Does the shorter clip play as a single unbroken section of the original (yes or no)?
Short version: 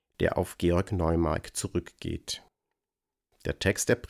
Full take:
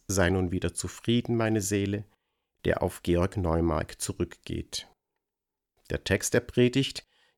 yes